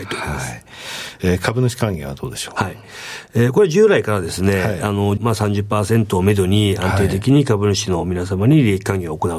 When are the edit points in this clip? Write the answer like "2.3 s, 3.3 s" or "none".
5.2 s